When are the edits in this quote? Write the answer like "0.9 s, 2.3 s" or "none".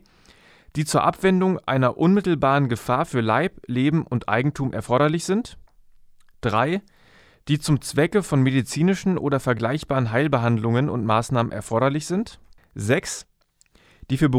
12.6 s

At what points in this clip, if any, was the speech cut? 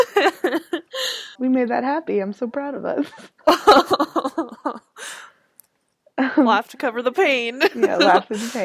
1.3 s

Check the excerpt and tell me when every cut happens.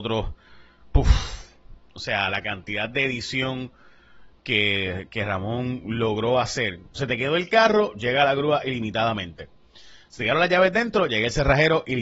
6.9 s

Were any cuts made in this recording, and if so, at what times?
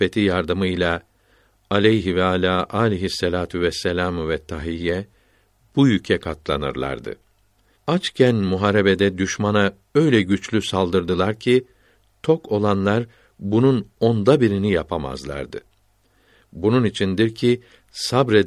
7.7 s

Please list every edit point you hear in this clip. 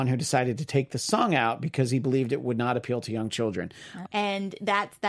4.1 s

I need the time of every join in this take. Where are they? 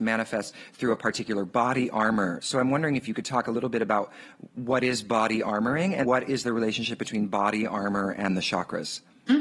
6.0 s

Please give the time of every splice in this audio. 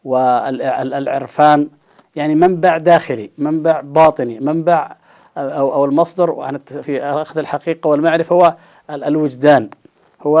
6.8 s

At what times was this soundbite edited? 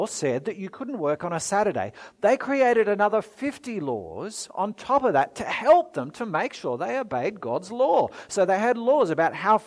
none

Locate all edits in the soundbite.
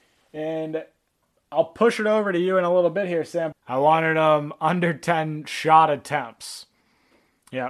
3.5 s

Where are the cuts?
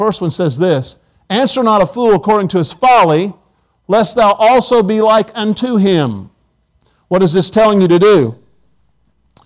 none

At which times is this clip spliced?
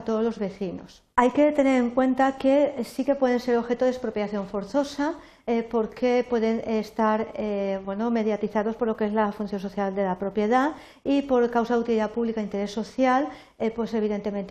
1.1 s

